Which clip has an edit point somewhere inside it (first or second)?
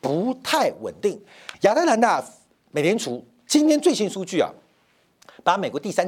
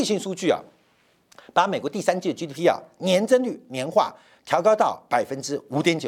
first